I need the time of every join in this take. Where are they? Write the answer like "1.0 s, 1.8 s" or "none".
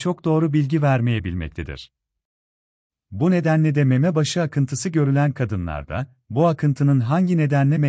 2.9 s